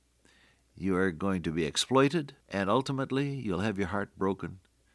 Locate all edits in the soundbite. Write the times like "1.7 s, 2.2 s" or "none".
2.4 s